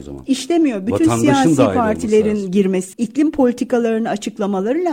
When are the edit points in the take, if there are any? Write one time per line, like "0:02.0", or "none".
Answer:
0:02.9